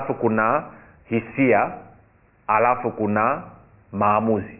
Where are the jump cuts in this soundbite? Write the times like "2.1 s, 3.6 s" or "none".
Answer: none